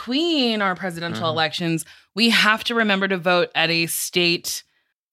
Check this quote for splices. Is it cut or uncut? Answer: uncut